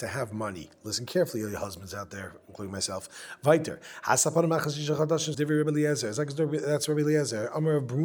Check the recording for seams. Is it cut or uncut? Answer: cut